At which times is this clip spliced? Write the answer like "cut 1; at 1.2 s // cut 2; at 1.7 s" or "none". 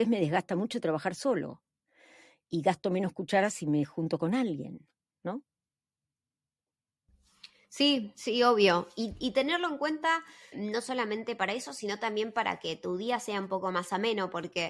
cut 1; at 10.5 s